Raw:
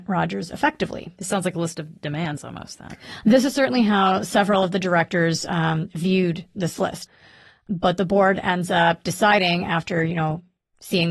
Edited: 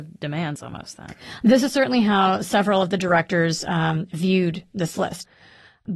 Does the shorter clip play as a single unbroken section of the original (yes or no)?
yes